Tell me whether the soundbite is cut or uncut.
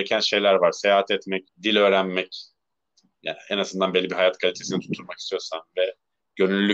cut